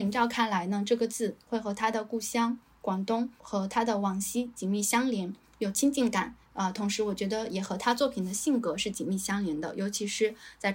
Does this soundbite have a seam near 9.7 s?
no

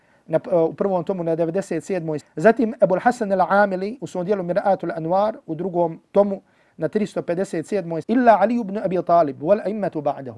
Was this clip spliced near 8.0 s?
yes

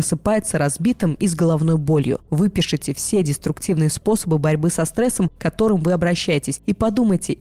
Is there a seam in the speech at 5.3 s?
no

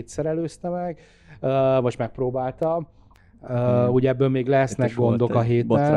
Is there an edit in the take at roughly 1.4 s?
no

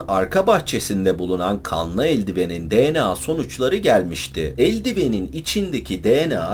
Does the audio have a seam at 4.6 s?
no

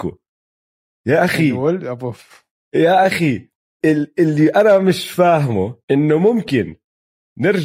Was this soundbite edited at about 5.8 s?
yes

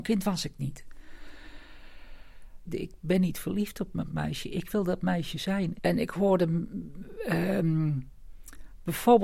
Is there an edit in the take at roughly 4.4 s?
no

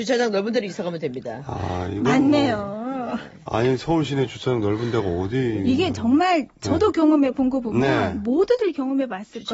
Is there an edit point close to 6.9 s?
no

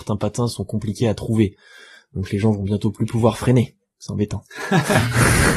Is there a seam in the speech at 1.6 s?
no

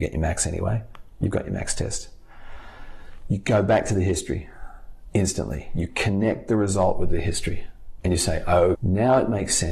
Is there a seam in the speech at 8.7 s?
yes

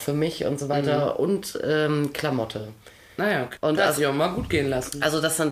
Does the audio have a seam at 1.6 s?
no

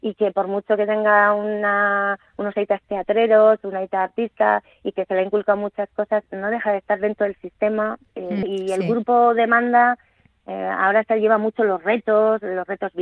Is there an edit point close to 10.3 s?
no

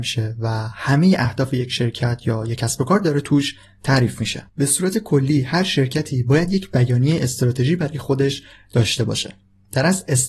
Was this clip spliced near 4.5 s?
yes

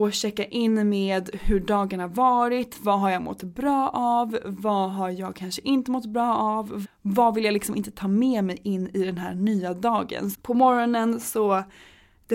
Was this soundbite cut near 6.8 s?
yes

